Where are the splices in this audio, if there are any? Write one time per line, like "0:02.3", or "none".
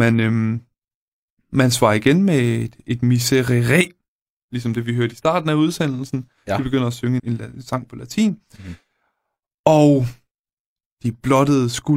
0:07.2

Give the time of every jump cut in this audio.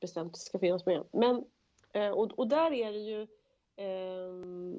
none

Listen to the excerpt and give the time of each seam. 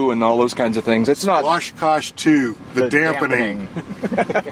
none

